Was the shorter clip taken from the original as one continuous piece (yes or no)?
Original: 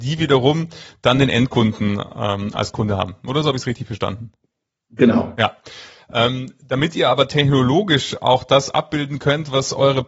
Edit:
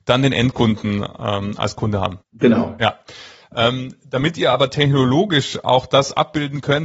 no